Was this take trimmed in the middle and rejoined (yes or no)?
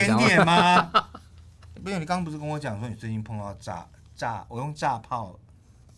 yes